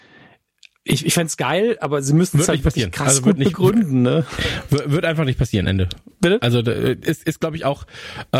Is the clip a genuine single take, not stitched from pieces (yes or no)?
yes